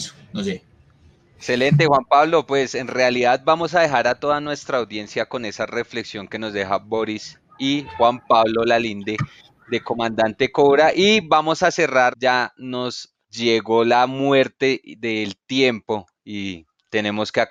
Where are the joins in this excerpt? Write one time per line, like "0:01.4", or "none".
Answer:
0:12.1
0:13.2